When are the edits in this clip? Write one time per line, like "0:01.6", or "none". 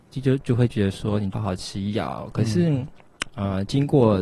0:01.3